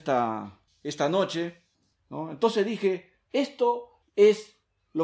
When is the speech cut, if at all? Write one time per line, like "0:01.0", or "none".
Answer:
0:02.0
0:03.3

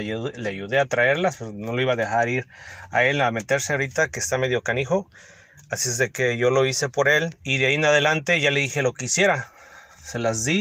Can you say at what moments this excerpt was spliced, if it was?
0:07.4

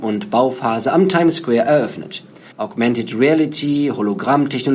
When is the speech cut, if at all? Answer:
0:02.5

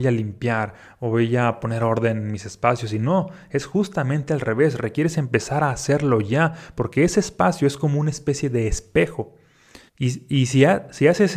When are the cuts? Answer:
0:09.9

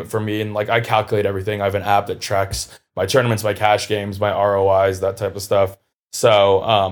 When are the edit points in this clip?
none

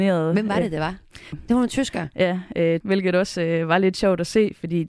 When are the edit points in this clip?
0:01.3
0:02.8

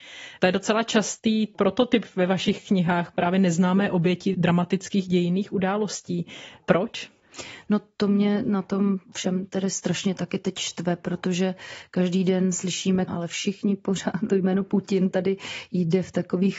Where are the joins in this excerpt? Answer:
0:13.1

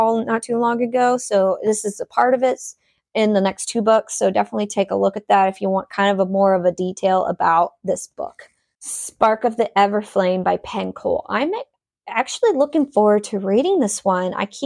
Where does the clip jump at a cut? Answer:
none

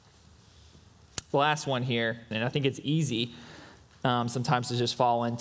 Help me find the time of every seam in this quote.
0:02.3

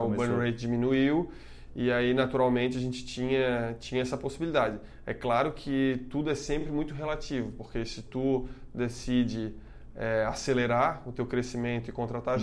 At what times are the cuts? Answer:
none

